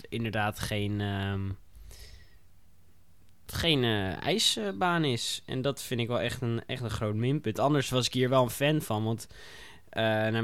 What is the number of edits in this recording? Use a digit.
0